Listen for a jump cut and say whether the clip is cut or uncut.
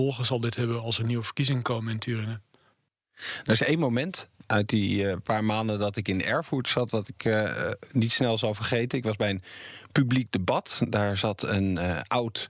uncut